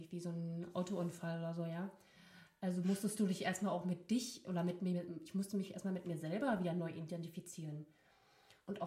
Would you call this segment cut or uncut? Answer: uncut